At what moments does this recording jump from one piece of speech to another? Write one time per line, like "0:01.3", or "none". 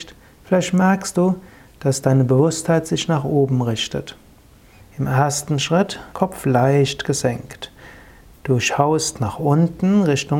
0:04.8
0:06.1